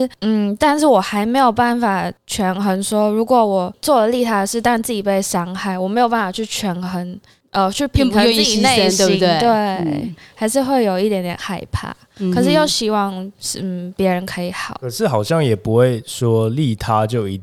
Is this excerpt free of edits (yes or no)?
yes